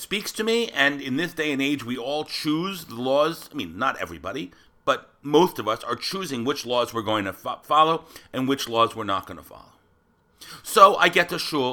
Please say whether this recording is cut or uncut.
uncut